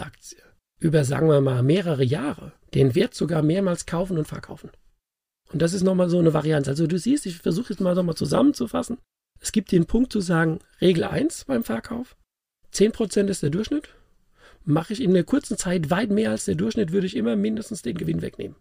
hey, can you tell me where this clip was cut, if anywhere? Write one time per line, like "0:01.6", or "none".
none